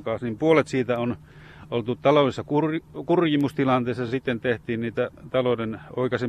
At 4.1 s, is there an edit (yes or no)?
no